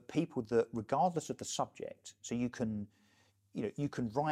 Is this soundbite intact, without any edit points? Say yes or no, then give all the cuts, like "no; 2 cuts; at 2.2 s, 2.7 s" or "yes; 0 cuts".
yes; 0 cuts